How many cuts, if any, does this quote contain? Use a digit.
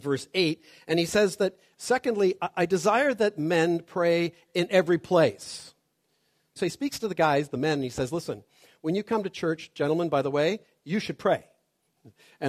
1